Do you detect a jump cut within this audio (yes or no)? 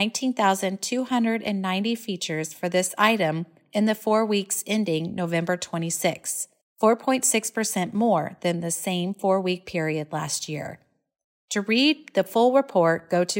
no